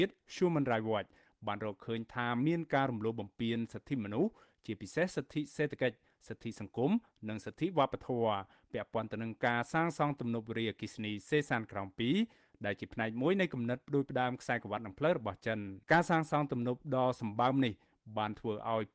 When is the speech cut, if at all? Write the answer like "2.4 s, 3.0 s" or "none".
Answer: 15.8 s